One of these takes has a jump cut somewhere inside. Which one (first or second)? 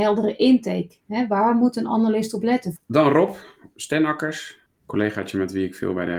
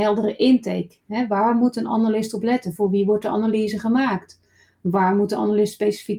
first